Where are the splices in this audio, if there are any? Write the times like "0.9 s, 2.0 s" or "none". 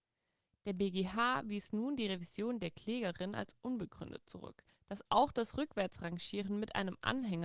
4.8 s